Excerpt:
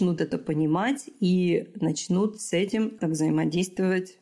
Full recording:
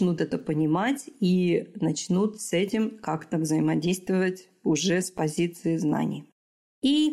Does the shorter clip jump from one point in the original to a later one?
yes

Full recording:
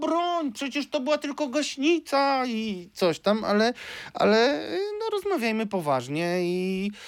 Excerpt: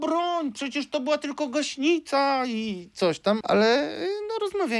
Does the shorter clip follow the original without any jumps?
no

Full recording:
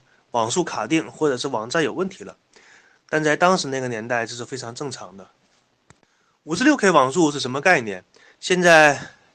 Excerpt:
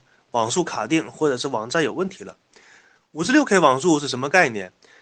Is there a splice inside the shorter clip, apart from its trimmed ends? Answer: yes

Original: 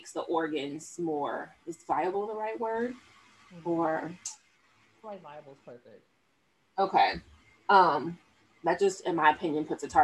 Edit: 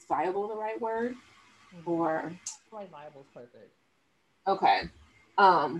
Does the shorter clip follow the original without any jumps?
no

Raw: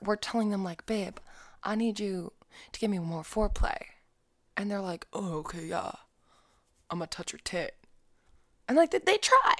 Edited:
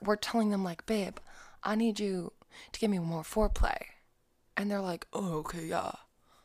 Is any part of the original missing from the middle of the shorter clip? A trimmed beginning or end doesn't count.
no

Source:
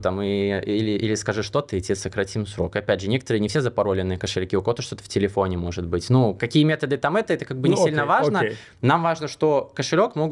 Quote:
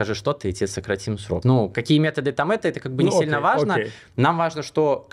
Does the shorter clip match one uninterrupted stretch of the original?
no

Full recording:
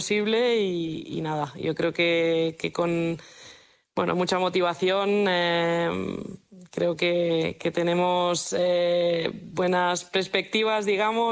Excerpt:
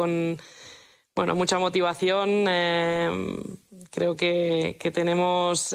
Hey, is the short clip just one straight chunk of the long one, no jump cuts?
yes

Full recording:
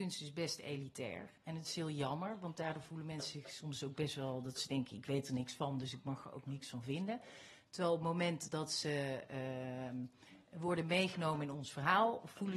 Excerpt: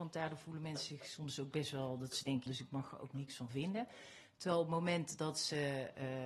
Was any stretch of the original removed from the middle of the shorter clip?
yes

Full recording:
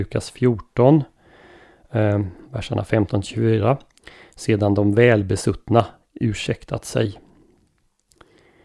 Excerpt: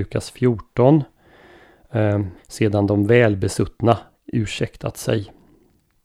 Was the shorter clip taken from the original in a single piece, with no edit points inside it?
no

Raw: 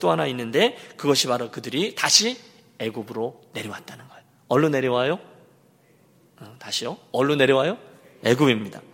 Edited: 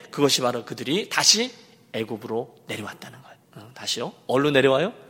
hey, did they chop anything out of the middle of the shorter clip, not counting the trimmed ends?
yes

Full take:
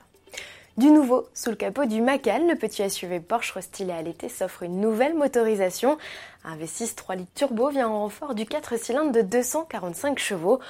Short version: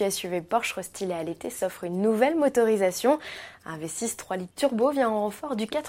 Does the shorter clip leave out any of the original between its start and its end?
no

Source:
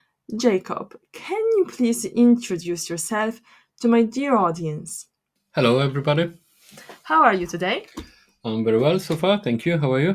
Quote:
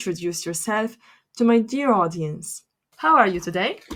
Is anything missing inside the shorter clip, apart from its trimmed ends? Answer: yes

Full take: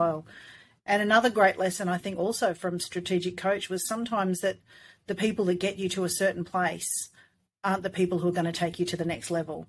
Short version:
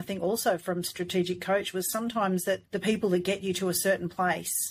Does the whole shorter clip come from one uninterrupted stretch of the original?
no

